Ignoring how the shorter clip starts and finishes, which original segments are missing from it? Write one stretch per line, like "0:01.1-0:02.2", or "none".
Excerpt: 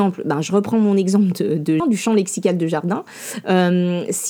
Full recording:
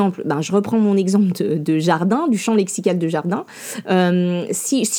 0:01.8-0:02.2